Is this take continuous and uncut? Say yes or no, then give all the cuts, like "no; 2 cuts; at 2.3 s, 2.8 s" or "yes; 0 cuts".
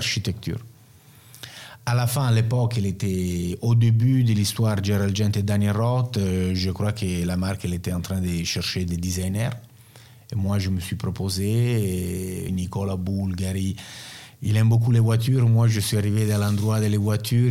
no; 1 cut; at 12.5 s